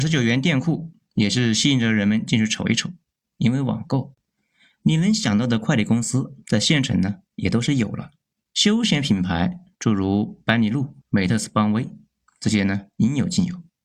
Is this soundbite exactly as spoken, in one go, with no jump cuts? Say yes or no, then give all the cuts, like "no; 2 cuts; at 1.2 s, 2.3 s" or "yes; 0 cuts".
no; 3 cuts; at 3.3 s, 8.5 s, 11.0 s